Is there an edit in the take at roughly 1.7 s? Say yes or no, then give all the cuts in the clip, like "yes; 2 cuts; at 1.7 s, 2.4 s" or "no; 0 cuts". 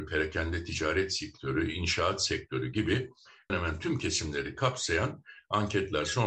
no; 1 cut; at 3.5 s